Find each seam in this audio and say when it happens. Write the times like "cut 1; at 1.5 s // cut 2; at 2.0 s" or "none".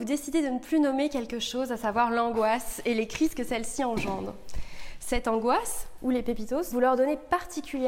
cut 1; at 6.7 s